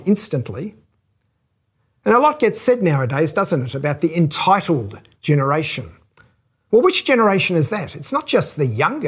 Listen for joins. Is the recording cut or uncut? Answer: uncut